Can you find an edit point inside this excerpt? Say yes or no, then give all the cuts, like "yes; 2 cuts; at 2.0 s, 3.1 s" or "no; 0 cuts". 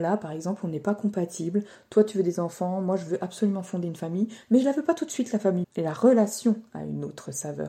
yes; 1 cut; at 5.6 s